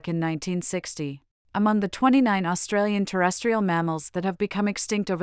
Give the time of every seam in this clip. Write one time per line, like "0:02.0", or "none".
0:01.4